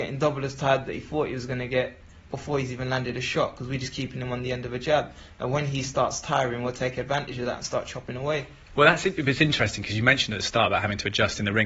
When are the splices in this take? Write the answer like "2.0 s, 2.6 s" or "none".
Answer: 2.3 s, 8.7 s